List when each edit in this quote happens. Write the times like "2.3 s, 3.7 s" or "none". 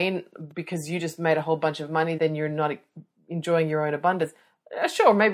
2.2 s